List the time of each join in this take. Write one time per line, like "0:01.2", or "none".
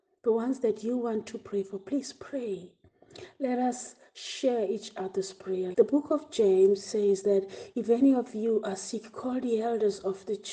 0:05.7